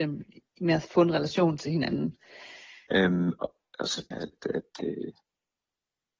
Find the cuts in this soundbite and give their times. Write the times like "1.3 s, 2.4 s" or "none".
2.9 s, 4.1 s